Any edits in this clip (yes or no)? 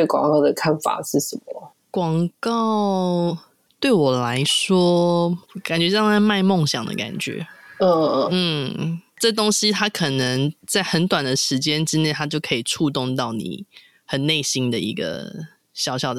yes